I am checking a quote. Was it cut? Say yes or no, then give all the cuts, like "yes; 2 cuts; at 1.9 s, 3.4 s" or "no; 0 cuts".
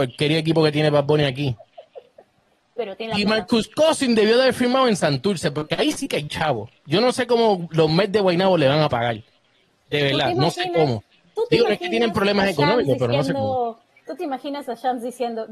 no; 0 cuts